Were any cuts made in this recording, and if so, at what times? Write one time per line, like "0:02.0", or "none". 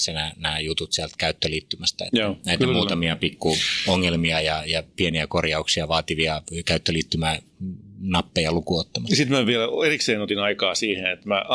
none